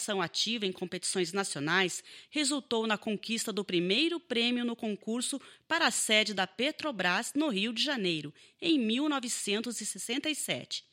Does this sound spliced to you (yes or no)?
no